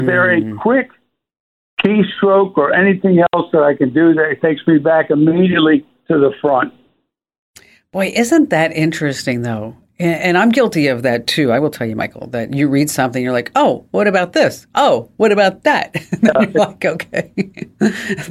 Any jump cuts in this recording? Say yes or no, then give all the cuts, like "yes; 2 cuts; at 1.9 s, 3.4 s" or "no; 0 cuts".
no; 0 cuts